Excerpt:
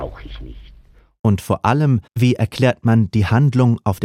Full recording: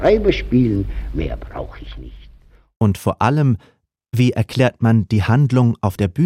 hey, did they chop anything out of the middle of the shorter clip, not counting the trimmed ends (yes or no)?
yes